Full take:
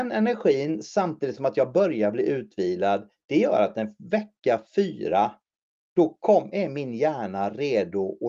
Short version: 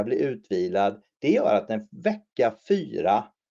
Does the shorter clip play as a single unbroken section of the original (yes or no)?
yes